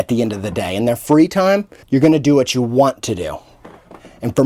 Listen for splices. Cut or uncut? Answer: cut